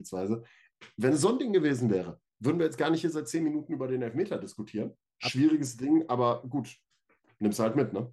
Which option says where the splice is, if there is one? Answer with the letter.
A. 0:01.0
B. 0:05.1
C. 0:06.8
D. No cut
B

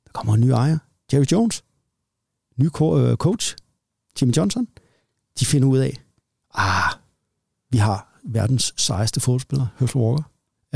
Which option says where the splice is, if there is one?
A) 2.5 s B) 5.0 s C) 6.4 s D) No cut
D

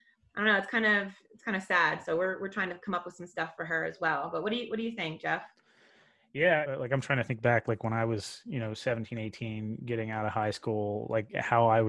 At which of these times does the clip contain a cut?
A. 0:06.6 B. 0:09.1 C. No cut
A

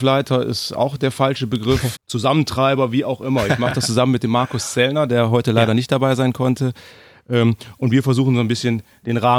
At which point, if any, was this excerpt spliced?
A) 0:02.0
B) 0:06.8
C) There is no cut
A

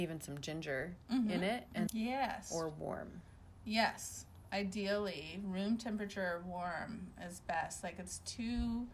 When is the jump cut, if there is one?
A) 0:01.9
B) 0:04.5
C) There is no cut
A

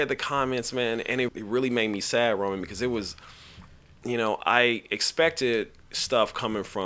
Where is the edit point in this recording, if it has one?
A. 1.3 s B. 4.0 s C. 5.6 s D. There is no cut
A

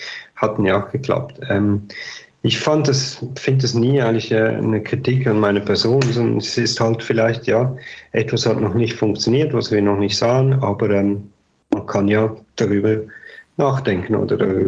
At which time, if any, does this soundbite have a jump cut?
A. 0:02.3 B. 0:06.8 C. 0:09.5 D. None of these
D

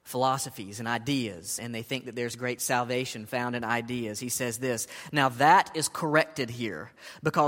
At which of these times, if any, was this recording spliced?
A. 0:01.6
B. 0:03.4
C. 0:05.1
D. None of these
A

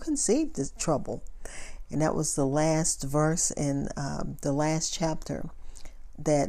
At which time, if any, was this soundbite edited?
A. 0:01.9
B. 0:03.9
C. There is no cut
A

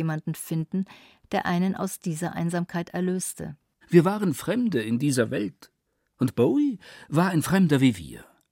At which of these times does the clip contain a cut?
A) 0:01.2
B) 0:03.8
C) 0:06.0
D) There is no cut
B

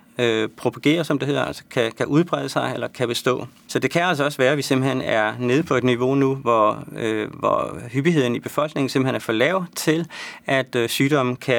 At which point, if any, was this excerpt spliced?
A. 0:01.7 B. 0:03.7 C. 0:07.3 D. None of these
B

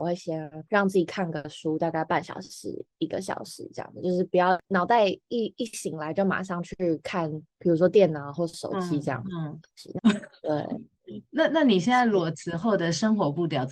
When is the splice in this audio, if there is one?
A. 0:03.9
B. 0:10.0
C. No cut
B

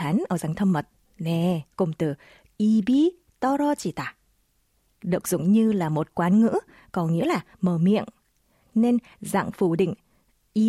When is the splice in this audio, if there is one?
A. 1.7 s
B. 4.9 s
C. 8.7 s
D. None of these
A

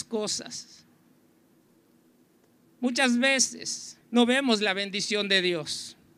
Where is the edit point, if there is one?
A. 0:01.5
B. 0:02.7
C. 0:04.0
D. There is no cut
C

